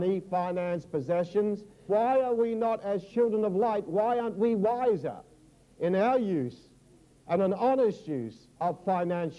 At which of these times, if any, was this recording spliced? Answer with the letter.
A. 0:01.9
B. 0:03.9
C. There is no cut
A